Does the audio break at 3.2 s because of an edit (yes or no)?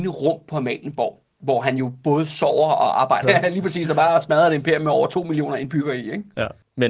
yes